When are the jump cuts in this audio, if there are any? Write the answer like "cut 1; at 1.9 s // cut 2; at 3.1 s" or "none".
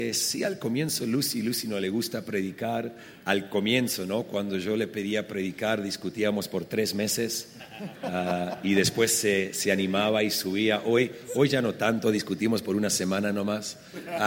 none

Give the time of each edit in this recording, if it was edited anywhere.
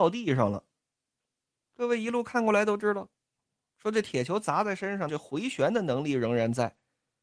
cut 1; at 1.5 s // cut 2; at 5.1 s

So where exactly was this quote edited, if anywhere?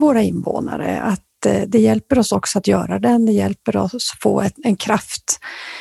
none

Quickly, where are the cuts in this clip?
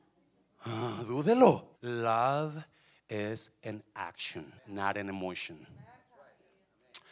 cut 1; at 1.7 s // cut 2; at 4.6 s

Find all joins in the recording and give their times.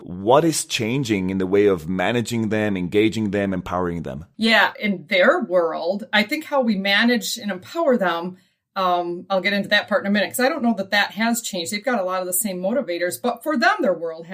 cut 1; at 4.7 s

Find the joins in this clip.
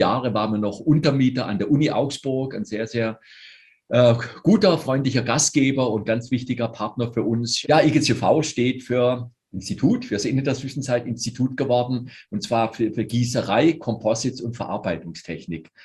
cut 1; at 7.6 s

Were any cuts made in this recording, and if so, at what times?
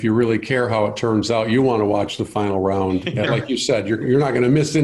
cut 1; at 3.3 s

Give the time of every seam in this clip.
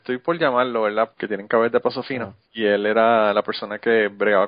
cut 1; at 1.1 s // cut 2; at 2.4 s

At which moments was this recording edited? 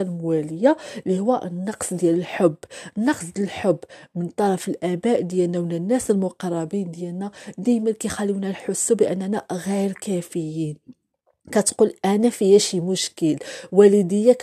none

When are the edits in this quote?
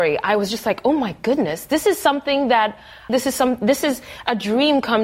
cut 1; at 3.1 s

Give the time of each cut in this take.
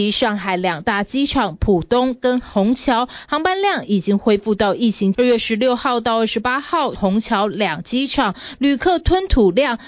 cut 1; at 5.1 s // cut 2; at 6.9 s

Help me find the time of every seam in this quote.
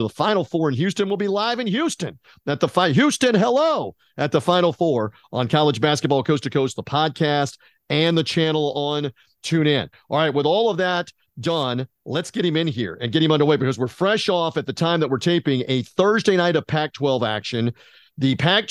none

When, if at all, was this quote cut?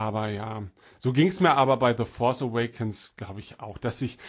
none

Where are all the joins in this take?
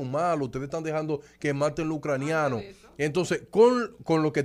none

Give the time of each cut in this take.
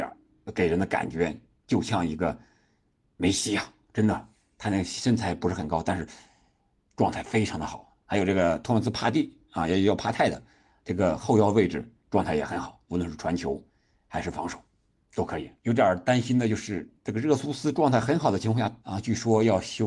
cut 1; at 15.6 s // cut 2; at 18.8 s

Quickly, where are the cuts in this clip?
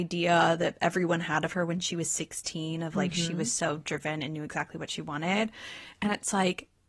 none

